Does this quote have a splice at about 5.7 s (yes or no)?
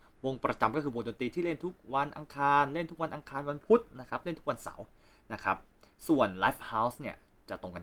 no